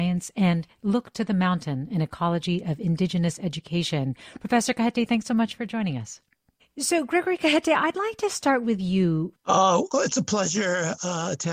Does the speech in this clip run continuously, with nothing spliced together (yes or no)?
no